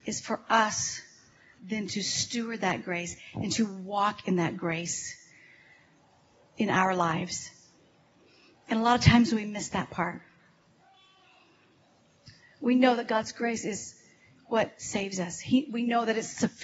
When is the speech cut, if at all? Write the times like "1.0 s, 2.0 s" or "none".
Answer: none